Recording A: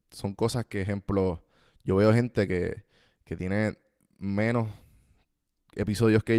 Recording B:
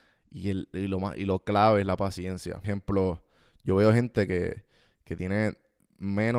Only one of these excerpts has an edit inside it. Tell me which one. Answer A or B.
B